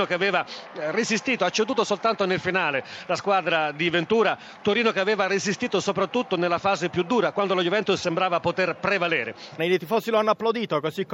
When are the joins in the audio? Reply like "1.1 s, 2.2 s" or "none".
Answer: 7.3 s, 9.6 s